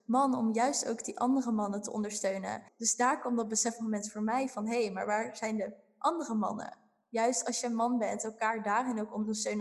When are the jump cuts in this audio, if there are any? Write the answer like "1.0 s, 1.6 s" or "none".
2.7 s